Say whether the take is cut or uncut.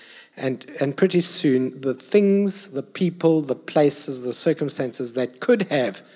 uncut